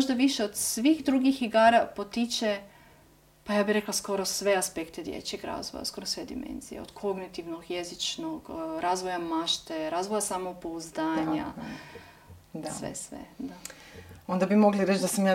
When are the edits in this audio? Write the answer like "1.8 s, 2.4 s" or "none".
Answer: none